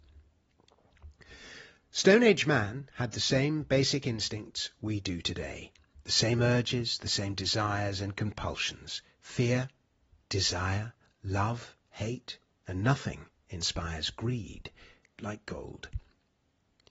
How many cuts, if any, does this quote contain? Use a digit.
2